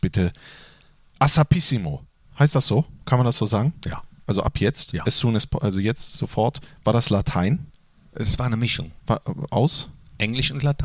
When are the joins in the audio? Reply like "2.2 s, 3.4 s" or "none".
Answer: none